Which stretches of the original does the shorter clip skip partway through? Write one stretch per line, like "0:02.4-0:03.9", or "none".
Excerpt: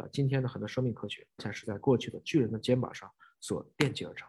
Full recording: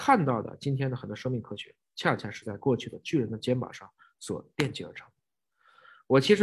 0:01.9-0:02.2